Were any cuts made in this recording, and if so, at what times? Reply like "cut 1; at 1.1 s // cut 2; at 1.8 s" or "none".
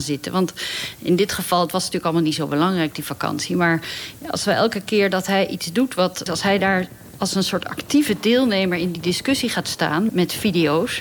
cut 1; at 6.3 s // cut 2; at 10.1 s